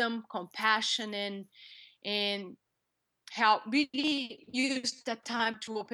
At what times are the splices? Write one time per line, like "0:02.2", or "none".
none